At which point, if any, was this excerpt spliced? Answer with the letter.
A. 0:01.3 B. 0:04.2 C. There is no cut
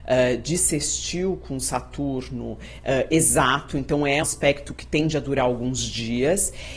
B